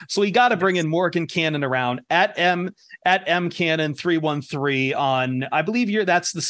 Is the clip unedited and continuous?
yes; 0 cuts

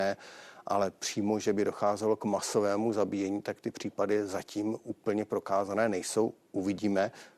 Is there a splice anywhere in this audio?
no; 0 cuts

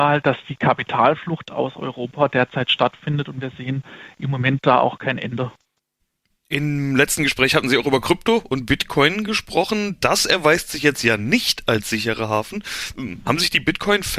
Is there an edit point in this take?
no; 0 cuts

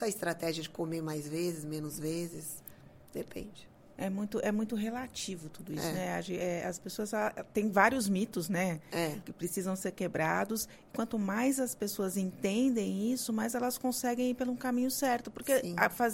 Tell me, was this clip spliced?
no; 0 cuts

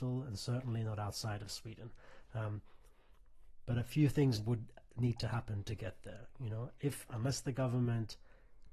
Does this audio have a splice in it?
yes; 1 cut; at 2.3 s

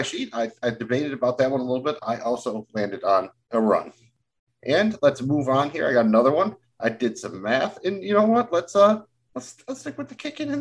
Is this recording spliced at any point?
no; 0 cuts

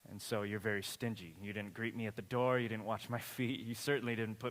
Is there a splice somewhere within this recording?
no; 0 cuts

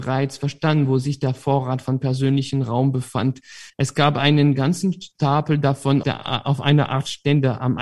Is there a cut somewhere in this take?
yes; 2 cuts; at 3.7 s, 6.0 s

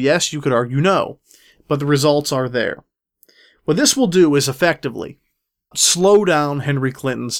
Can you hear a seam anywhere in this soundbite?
yes; 1 cut; at 5.7 s

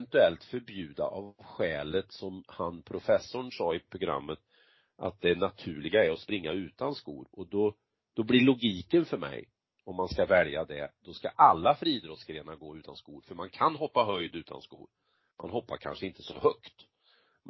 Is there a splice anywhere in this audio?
no; 0 cuts

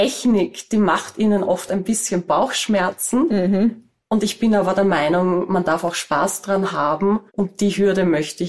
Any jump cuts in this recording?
yes; 1 cut; at 7.3 s

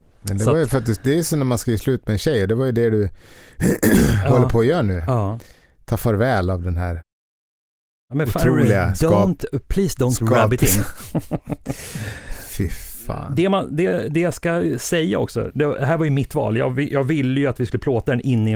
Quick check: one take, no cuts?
yes; 0 cuts

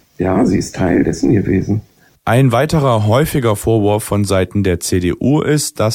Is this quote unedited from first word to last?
yes; 0 cuts

